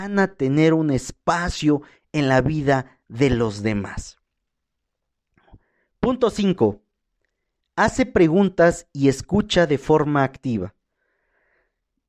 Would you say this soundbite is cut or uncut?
uncut